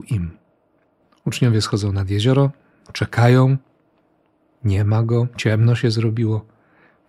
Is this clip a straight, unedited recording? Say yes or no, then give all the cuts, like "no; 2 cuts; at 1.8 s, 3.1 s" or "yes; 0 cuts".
yes; 0 cuts